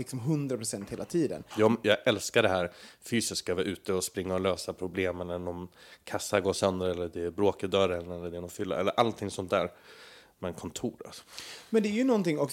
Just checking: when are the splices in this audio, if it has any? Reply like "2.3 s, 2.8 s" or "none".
1.5 s